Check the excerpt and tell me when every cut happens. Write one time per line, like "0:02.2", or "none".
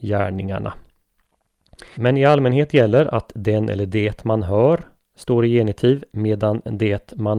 0:01.9